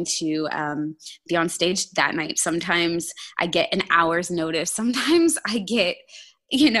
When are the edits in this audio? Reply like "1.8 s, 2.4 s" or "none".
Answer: none